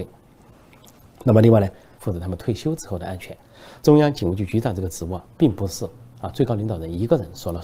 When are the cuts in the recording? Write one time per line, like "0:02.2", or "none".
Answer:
0:02.0
0:03.8